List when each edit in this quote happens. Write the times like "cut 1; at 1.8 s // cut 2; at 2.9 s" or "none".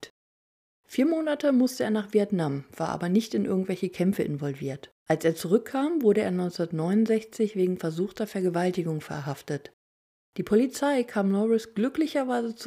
cut 1; at 4.9 s